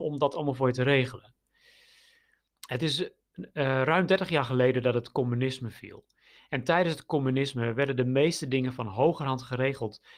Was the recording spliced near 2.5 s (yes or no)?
yes